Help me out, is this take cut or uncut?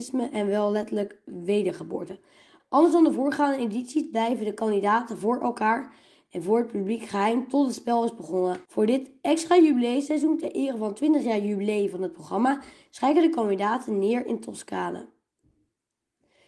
cut